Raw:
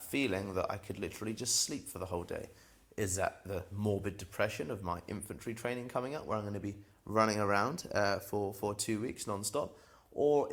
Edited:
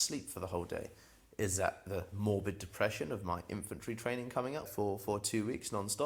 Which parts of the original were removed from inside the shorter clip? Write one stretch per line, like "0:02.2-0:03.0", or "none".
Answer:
0:06.2-0:08.2